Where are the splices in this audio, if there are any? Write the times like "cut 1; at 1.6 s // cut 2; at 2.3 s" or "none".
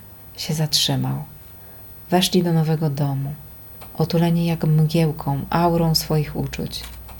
none